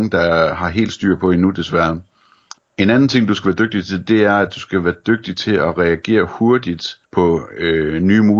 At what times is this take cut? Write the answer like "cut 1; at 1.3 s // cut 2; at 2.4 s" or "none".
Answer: cut 1; at 2.6 s // cut 2; at 7.0 s